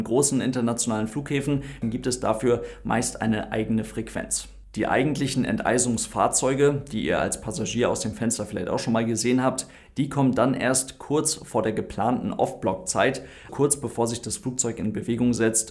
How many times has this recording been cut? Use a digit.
2